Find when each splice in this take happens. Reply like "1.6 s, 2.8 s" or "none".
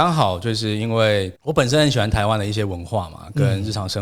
1.4 s